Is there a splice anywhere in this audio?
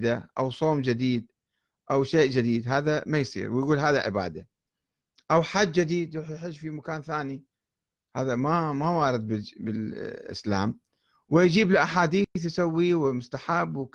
no; 0 cuts

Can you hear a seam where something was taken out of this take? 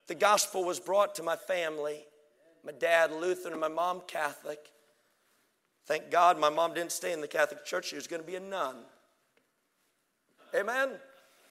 yes; 1 cut; at 10.4 s

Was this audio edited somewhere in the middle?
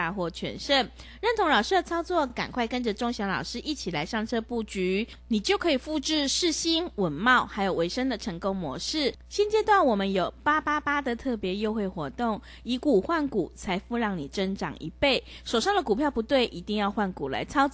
no; 0 cuts

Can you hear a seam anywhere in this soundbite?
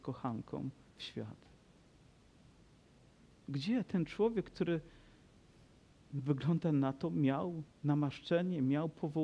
no; 0 cuts

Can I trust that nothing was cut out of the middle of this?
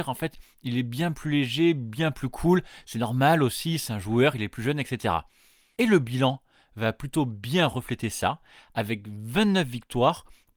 yes; 0 cuts

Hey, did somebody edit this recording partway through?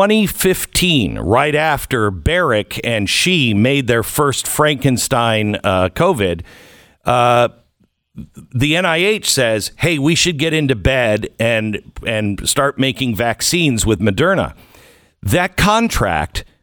no; 0 cuts

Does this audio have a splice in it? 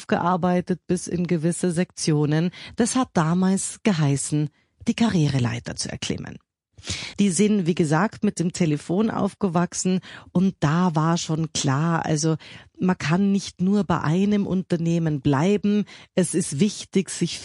yes; 1 cut; at 7.1 s

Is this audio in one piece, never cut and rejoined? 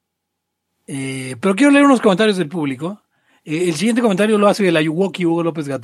no; 1 cut; at 1.4 s

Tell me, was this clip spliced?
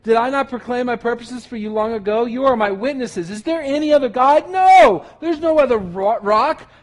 no; 0 cuts

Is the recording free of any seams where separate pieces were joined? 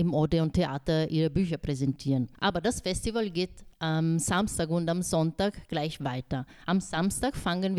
yes; 0 cuts

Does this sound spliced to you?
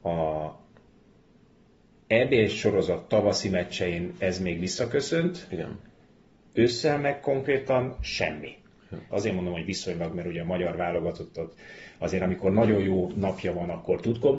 yes; 1 cut; at 9.1 s

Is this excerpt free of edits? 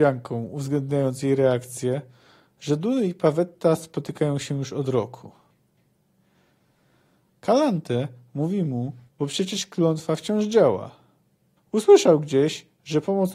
no; 2 cuts; at 9.1 s, 11.6 s

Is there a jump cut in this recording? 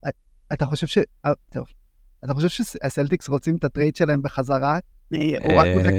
yes; 1 cut; at 4.9 s

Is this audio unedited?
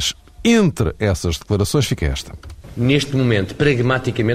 yes; 0 cuts

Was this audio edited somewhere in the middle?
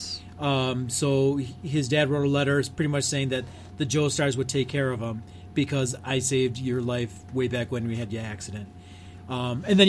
no; 0 cuts

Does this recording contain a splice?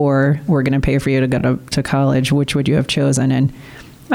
no; 0 cuts

